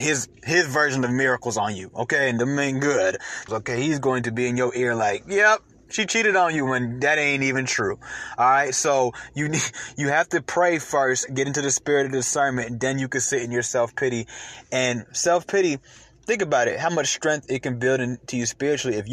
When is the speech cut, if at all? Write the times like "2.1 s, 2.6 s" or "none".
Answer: 3.5 s